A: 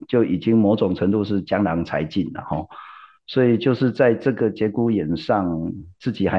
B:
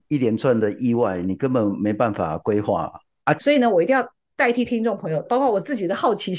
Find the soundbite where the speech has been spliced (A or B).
B